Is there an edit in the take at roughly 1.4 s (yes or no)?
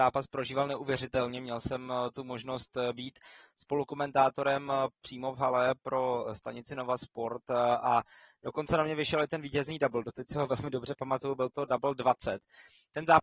no